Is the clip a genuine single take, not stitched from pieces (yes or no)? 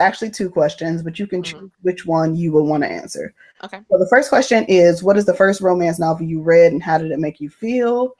yes